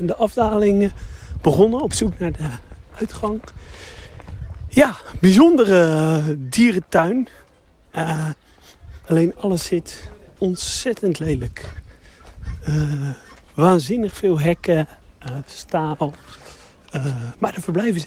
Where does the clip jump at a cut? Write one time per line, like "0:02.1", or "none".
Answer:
0:09.1